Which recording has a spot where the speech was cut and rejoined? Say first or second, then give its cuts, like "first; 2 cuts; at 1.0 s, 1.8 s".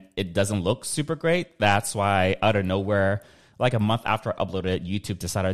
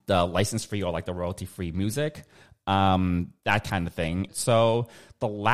second; 1 cut; at 4.3 s